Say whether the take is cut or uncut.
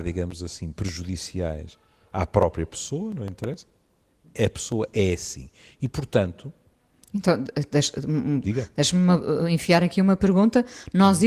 uncut